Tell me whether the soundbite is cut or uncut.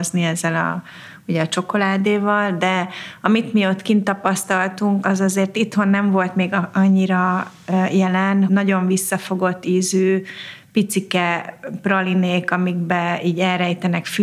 cut